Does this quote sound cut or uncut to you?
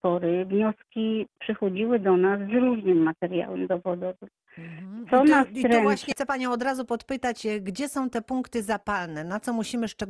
cut